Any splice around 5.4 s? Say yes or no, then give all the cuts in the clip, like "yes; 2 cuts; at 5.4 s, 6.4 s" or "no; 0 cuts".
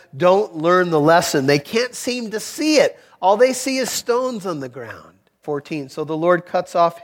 yes; 1 cut; at 5.4 s